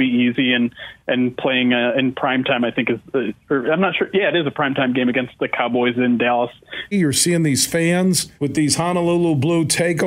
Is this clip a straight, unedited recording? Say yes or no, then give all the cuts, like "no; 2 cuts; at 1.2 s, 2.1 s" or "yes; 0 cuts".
no; 2 cuts; at 6.9 s, 8.4 s